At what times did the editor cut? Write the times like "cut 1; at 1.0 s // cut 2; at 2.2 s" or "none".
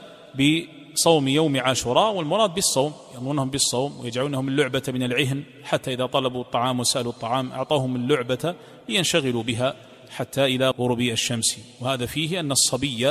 cut 1; at 10.7 s